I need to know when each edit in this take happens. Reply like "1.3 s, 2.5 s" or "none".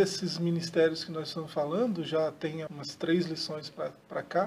2.7 s